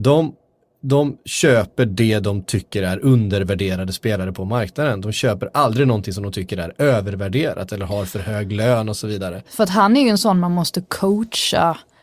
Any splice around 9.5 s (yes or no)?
yes